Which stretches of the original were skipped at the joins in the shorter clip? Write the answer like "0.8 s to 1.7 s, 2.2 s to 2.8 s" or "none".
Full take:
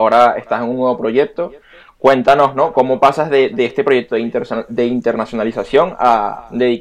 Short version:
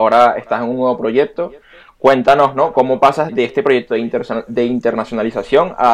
3.3 s to 3.5 s